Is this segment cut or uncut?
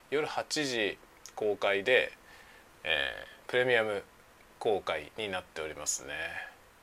cut